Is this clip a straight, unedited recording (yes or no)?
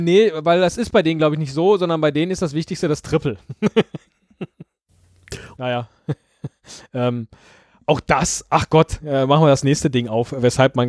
no